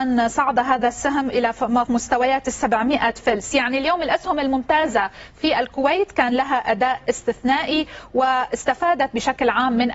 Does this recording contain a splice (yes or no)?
yes